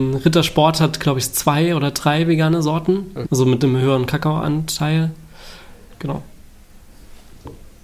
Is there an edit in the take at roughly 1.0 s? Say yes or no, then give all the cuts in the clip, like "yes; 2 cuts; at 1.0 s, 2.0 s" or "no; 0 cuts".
no; 2 cuts; at 3.2 s, 5.9 s